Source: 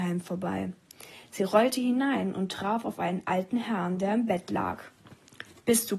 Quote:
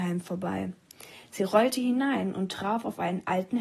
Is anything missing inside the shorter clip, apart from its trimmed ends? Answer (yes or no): no